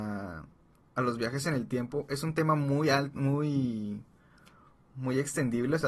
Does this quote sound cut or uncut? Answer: uncut